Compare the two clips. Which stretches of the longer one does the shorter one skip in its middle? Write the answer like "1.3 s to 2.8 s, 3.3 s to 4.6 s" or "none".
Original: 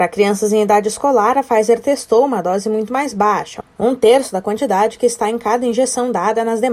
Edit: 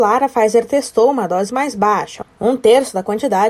2.6 s to 2.9 s